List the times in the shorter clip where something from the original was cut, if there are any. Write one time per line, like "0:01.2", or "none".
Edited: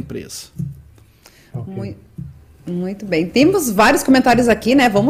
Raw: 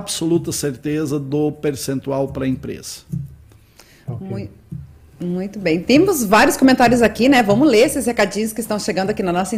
none